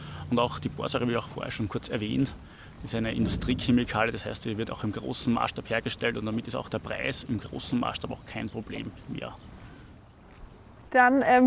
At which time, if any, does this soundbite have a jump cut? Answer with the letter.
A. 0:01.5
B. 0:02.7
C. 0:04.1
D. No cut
D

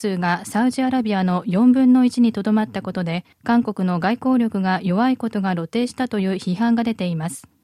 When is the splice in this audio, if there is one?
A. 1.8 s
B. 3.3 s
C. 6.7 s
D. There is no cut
B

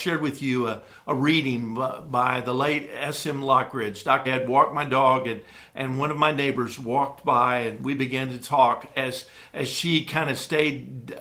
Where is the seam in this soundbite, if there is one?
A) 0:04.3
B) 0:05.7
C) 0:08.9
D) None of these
A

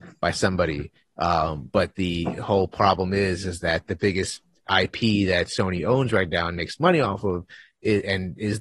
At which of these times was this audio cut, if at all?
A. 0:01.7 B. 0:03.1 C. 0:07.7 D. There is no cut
D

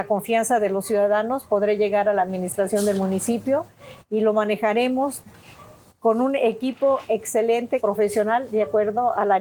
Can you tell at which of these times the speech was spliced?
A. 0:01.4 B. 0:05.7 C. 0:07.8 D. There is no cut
C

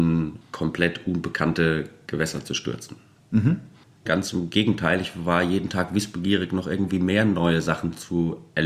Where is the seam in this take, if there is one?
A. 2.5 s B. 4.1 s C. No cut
B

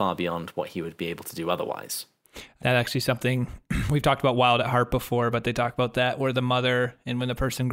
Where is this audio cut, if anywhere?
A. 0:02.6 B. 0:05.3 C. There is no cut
A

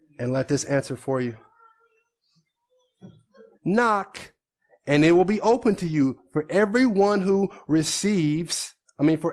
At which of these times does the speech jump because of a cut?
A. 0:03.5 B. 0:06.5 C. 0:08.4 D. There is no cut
A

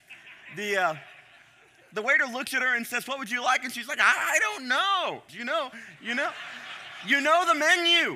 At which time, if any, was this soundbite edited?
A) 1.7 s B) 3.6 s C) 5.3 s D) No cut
C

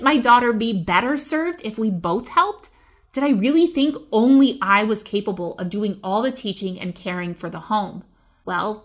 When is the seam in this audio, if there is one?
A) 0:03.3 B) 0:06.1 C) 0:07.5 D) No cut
D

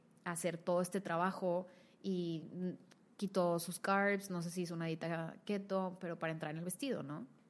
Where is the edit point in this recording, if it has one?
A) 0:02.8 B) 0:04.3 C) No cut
C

